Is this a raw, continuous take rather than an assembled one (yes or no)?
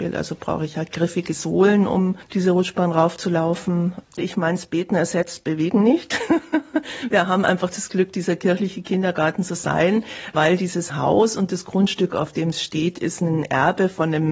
no